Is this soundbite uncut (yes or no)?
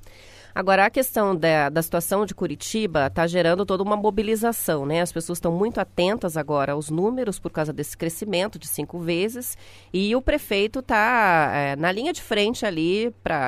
yes